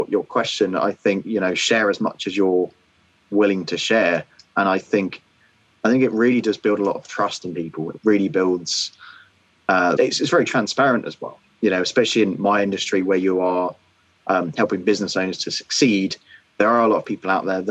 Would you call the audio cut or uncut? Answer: cut